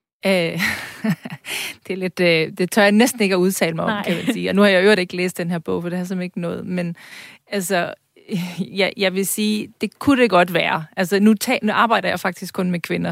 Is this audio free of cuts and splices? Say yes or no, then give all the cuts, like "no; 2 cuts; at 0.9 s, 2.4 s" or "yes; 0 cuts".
yes; 0 cuts